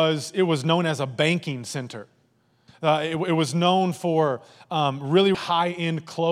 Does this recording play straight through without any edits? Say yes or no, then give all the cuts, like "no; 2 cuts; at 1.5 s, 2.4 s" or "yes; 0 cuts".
no; 2 cuts; at 2.7 s, 5.3 s